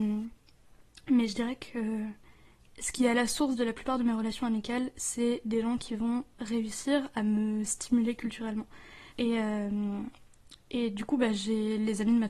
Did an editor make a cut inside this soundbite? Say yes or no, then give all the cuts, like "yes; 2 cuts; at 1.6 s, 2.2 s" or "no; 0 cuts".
yes; 2 cuts; at 6.3 s, 9.1 s